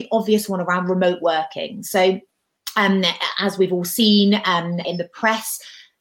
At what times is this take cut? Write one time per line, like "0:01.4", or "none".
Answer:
0:04.8